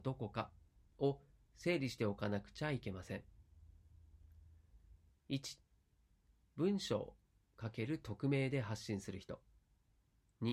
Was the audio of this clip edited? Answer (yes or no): yes